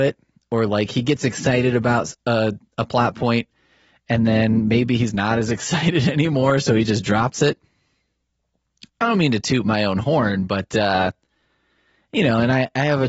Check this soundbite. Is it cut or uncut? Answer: uncut